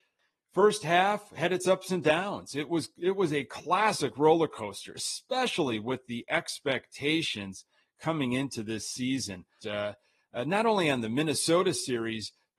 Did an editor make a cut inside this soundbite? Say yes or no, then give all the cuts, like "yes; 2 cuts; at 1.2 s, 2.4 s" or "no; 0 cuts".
yes; 1 cut; at 9.6 s